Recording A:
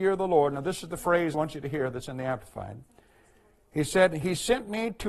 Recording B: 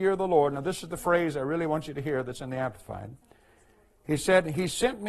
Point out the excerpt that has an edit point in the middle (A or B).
A